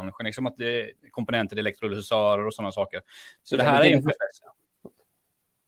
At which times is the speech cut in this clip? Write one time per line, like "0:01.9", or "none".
0:01.0
0:03.4